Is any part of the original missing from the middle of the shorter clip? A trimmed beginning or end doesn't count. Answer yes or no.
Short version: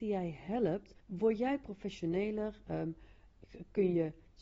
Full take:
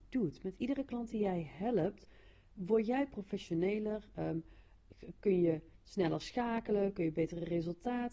yes